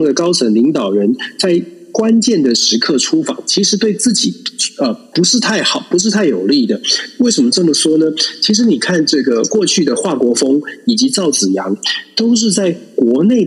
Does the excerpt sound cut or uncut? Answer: uncut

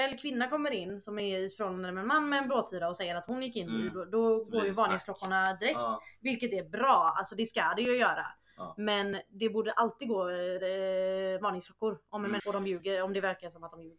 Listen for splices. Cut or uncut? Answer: cut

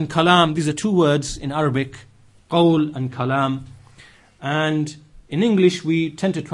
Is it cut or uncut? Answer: uncut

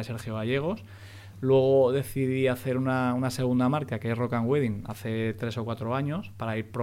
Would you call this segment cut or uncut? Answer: uncut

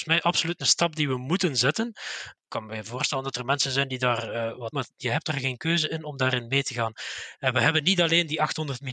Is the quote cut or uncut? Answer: cut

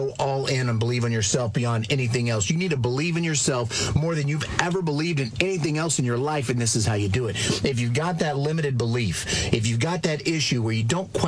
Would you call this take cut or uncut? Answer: uncut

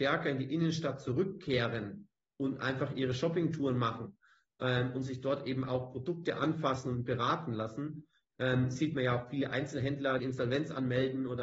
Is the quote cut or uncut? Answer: cut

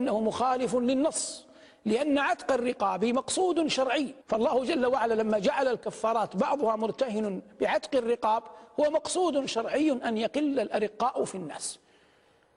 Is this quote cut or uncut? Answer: cut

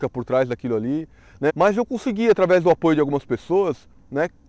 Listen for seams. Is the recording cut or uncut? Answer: cut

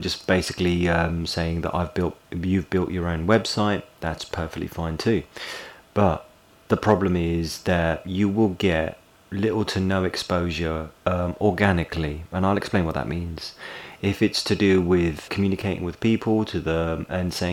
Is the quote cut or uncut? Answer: cut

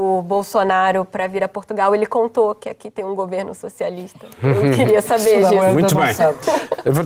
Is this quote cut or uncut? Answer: uncut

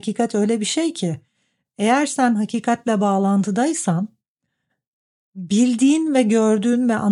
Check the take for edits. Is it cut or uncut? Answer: uncut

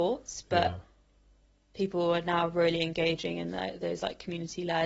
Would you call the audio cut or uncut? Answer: uncut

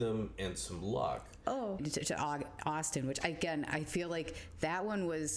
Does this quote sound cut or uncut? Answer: cut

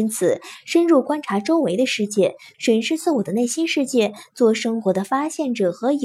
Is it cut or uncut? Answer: cut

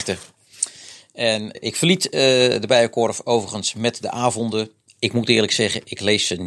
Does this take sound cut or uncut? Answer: cut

